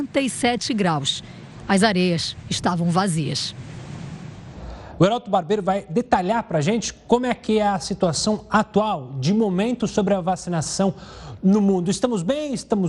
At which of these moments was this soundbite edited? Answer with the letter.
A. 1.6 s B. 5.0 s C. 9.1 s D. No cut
B